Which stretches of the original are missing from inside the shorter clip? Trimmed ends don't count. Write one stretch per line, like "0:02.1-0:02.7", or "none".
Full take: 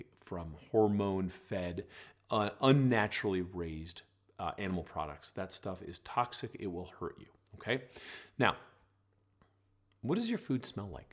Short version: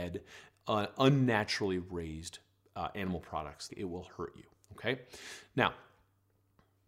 0:05.3-0:06.5